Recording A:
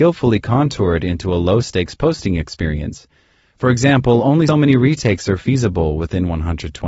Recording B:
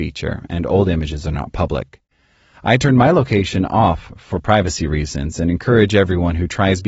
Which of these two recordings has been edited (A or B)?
A